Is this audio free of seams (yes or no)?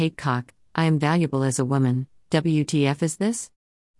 yes